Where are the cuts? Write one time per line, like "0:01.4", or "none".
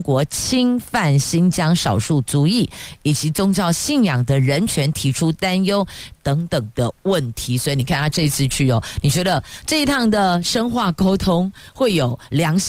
0:06.1